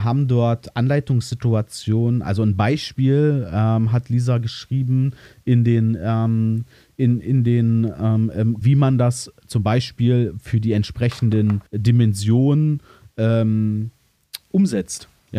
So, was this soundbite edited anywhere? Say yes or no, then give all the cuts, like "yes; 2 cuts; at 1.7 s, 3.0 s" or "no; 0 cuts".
yes; 2 cuts; at 8.6 s, 11.7 s